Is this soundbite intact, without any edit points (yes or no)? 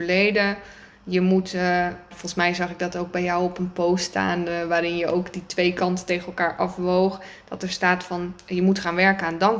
no